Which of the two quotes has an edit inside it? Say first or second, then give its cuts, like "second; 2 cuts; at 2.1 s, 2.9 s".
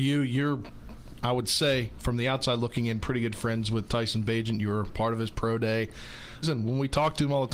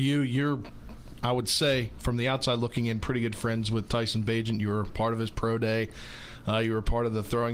first; 1 cut; at 6.4 s